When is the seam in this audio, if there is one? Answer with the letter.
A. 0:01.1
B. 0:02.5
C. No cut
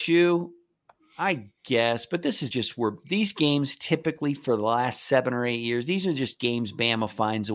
C